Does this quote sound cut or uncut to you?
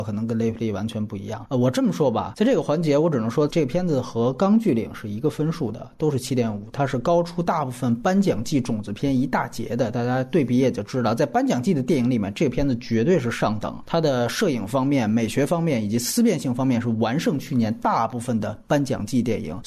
cut